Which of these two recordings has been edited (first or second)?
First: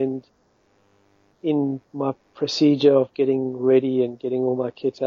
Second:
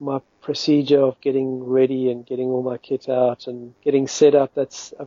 second